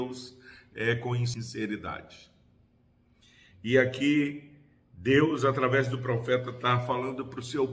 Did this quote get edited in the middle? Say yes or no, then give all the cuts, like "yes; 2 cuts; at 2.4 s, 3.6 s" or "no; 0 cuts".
no; 0 cuts